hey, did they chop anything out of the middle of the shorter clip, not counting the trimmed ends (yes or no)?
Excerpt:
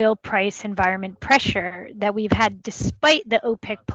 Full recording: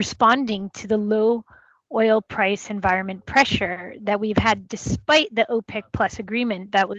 no